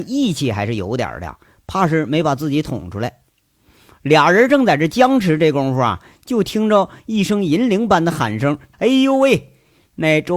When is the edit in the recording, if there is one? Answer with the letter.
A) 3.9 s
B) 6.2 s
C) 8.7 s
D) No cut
C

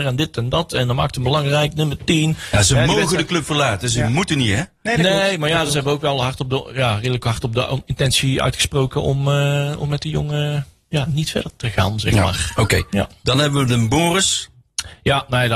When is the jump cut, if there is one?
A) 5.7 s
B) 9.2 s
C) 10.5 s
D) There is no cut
D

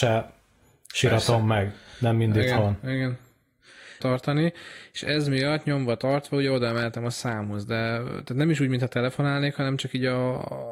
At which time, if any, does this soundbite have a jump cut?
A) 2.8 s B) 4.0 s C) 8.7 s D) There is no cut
B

